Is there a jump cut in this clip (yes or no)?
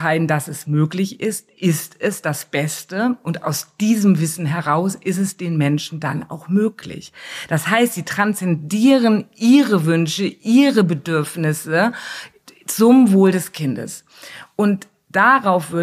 no